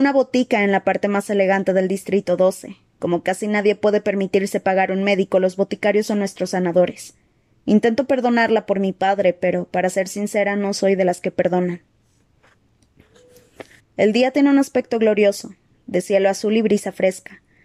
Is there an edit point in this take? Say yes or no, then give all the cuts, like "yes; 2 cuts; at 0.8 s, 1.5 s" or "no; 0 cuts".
yes; 2 cuts; at 7.5 s, 13.8 s